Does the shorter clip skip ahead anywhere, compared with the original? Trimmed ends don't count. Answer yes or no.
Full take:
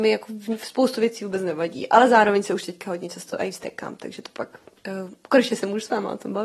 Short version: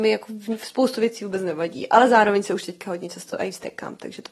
no